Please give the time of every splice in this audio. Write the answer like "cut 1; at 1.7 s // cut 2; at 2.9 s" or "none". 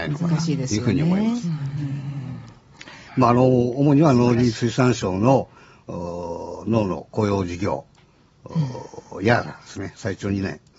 cut 1; at 3.1 s